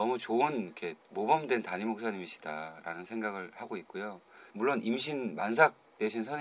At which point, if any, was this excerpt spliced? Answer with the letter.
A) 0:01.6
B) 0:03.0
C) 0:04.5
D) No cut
C